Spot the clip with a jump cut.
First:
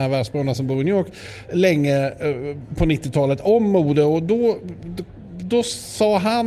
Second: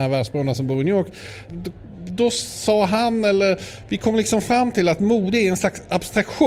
second; 1 cut; at 1.5 s

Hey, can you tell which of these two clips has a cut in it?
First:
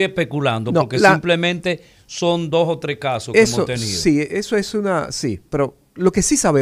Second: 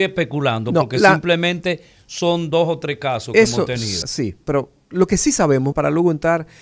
second; 2 cuts; at 4.0 s, 5.7 s

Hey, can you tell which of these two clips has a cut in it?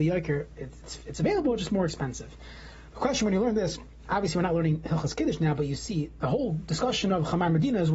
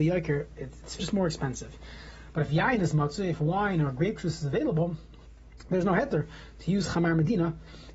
second; 2 cuts; at 1.0 s, 2.3 s

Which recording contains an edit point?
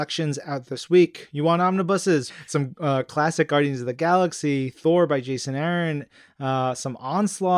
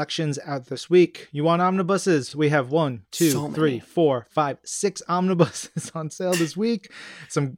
first; 1 cut; at 2.3 s

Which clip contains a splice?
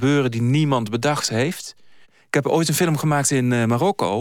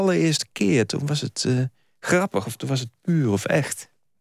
first; 1 cut; at 2.0 s

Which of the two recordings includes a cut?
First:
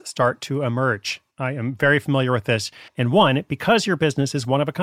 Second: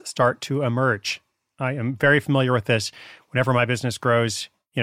first; 2 cuts; at 1.3 s, 2.9 s

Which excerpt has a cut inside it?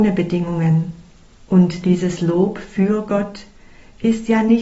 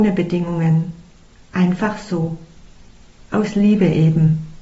first; 1 cut; at 1.3 s

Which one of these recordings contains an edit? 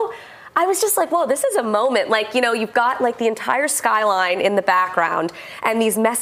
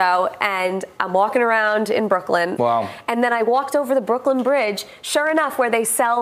second; 1 cut; at 2.6 s

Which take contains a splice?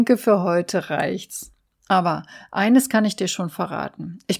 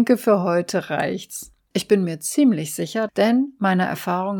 second; 2 cuts; at 1.7 s, 3.1 s

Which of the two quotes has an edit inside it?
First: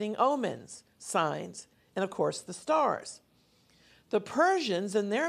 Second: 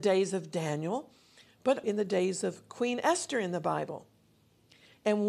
second; 1 cut; at 1.8 s

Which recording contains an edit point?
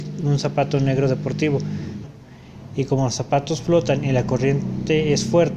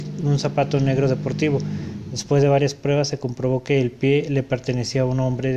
first; 1 cut; at 2.0 s

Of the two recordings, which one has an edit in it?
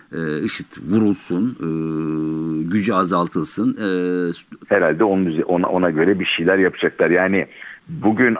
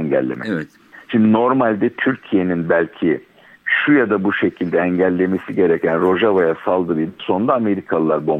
first; 1 cut; at 4.6 s

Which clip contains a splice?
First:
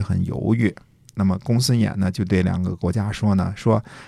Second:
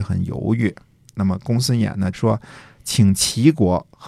second; 1 cut; at 2.1 s

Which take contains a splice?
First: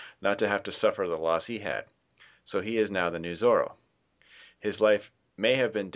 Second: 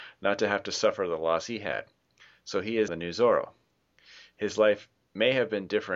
second; 1 cut; at 2.9 s

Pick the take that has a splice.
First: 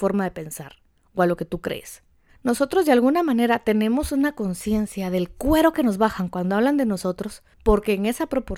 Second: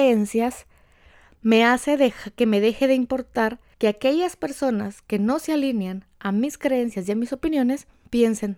first; 1 cut; at 2.3 s

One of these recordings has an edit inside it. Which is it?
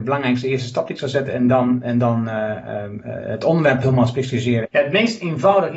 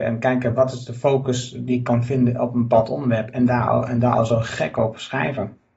first; 1 cut; at 4.7 s

